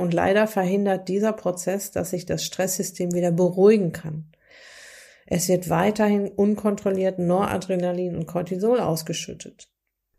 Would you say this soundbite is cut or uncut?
uncut